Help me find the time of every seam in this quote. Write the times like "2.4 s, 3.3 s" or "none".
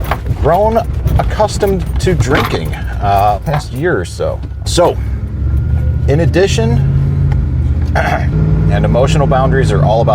3.4 s, 4.6 s, 8.3 s